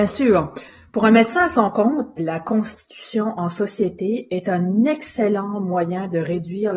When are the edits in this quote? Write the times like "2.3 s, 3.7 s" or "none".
2.2 s